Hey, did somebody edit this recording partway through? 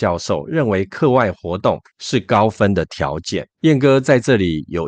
yes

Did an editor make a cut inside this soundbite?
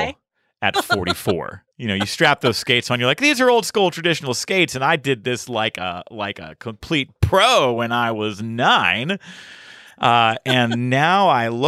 yes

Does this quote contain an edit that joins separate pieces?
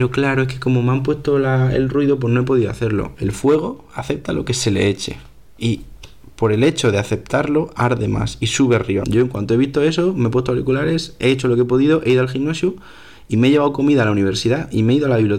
yes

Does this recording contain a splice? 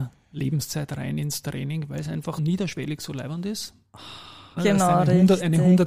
yes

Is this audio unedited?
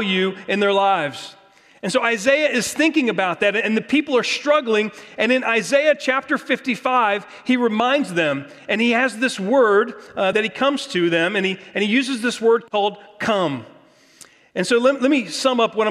yes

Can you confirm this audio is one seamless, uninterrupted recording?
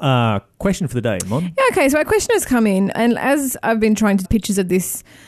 no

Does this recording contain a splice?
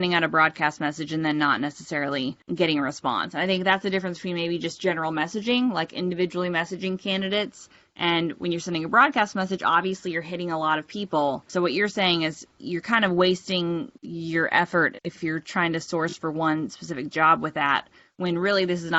yes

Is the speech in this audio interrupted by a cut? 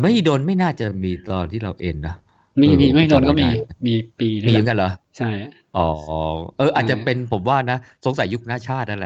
no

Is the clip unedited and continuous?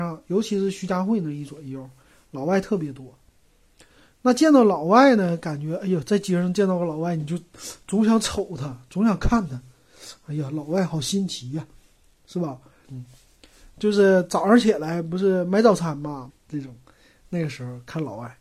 no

